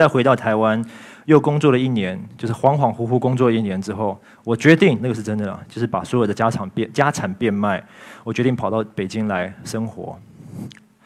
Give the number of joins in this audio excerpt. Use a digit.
1